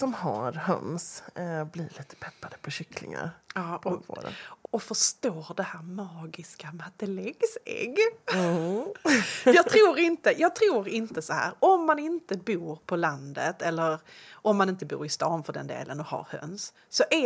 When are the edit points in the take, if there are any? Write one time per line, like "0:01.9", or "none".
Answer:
0:04.6